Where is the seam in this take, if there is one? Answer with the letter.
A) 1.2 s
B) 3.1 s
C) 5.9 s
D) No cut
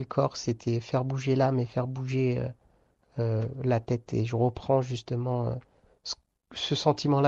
D